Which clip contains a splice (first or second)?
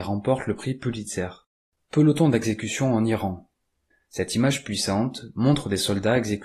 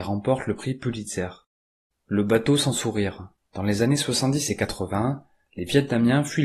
first